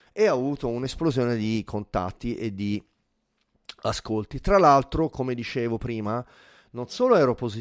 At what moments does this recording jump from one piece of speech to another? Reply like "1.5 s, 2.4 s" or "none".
none